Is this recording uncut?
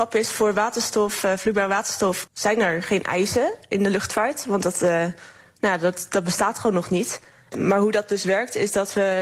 yes; 0 cuts

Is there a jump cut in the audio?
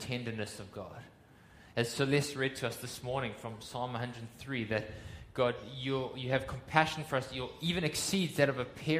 no; 0 cuts

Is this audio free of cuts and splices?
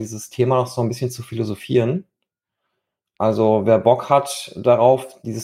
yes; 0 cuts

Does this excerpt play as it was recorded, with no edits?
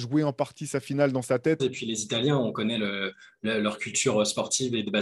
no; 1 cut; at 1.6 s

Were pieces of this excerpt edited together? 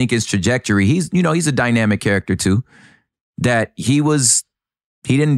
no; 0 cuts

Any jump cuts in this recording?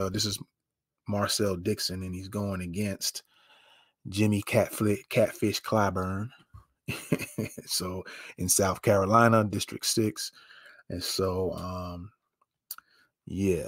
no; 0 cuts

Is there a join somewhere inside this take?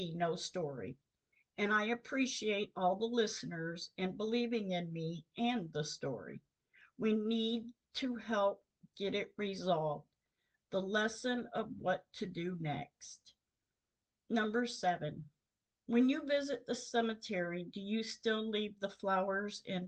no; 0 cuts

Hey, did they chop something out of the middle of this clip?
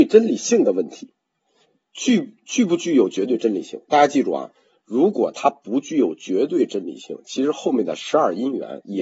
no; 0 cuts

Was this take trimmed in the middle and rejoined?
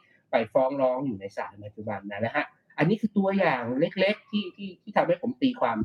no; 0 cuts

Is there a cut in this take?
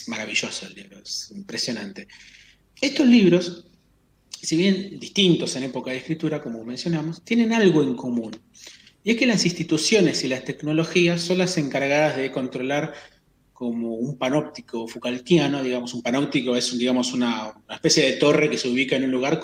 no; 0 cuts

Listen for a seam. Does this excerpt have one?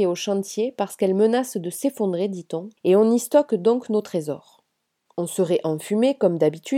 yes; 2 cuts; at 2.8 s, 5.1 s

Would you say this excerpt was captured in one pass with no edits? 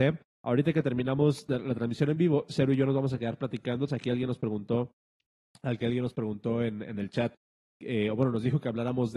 no; 1 cut; at 3.9 s

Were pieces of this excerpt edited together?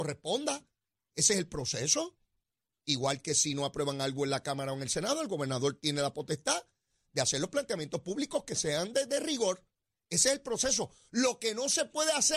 no; 0 cuts

